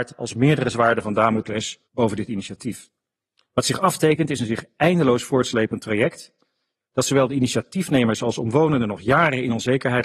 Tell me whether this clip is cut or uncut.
cut